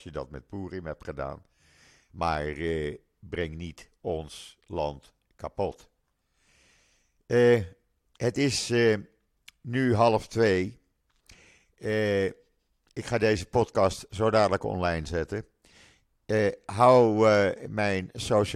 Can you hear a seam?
no; 0 cuts

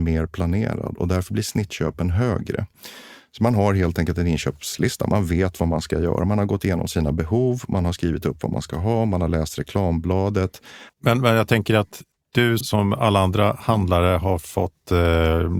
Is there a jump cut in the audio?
yes; 2 cuts; at 10.9 s, 12.6 s

